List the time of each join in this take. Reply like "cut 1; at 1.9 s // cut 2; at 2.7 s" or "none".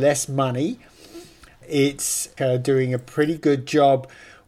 cut 1; at 2.4 s